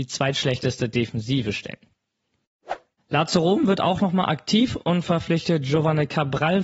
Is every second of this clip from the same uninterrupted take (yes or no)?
no